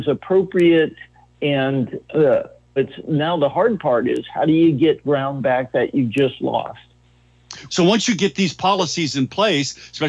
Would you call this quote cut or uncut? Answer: cut